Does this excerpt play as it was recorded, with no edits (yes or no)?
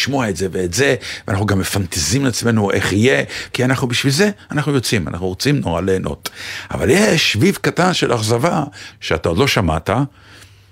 no